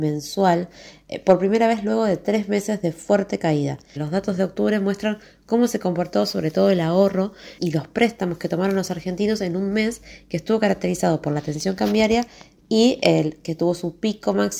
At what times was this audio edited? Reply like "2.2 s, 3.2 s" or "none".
4.0 s, 7.6 s